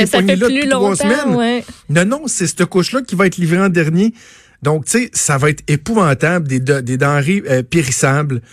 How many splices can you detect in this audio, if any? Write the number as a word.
zero